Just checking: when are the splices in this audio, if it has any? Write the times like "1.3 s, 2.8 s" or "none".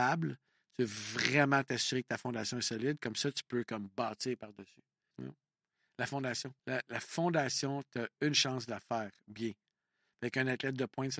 5.1 s, 6.6 s